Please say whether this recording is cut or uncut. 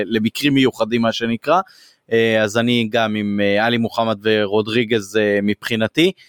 uncut